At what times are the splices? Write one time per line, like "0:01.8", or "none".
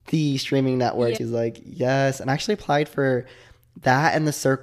0:01.2

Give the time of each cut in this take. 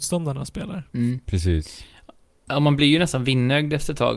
none

